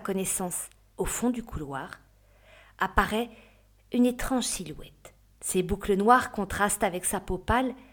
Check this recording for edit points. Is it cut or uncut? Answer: cut